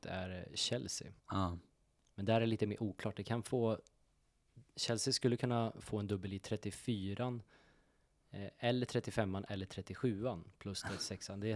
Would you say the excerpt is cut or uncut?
cut